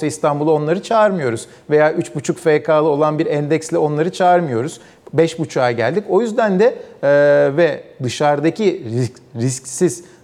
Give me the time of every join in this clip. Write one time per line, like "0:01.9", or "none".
none